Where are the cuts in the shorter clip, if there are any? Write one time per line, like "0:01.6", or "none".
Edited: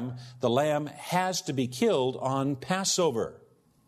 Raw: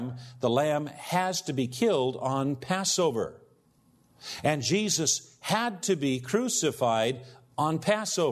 none